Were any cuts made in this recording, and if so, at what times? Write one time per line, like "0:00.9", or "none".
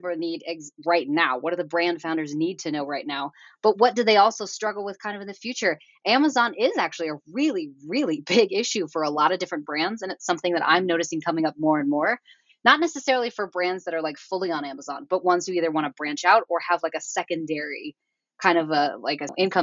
none